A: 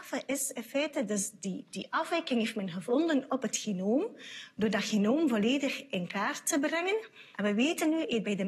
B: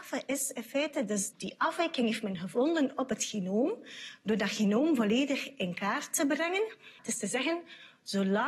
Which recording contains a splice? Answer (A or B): B